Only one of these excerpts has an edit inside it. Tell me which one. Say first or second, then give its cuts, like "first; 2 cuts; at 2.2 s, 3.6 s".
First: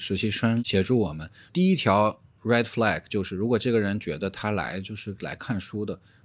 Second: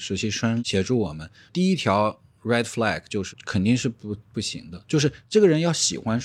second; 1 cut; at 3.3 s